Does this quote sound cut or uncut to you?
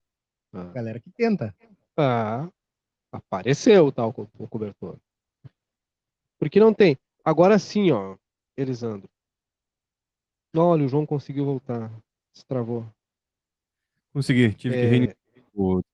uncut